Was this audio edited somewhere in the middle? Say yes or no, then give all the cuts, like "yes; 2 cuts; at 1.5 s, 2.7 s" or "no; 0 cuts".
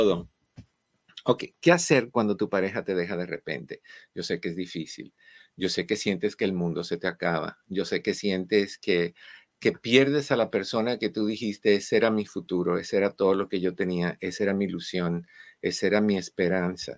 no; 0 cuts